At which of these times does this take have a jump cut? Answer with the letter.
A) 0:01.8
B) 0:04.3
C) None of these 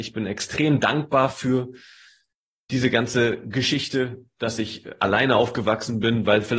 C